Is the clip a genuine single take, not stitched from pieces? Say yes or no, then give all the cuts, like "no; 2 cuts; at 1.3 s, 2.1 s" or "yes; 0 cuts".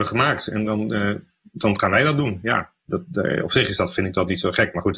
yes; 0 cuts